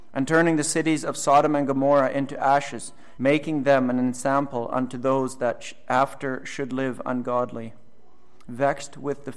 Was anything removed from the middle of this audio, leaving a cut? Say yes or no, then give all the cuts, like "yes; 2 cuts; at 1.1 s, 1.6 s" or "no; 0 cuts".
yes; 2 cuts; at 3.2 s, 8.5 s